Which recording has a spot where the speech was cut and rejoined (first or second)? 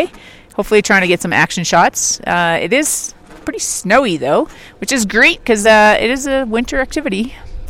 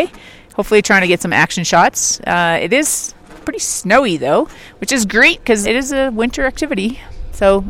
second